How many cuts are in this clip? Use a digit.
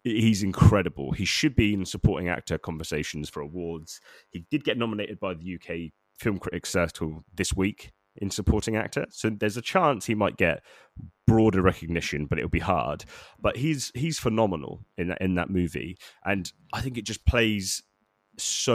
0